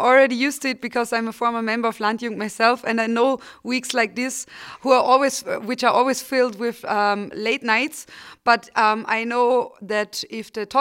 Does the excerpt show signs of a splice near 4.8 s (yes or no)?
no